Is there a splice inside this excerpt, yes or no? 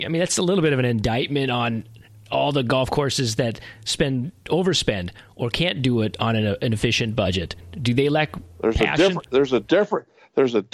no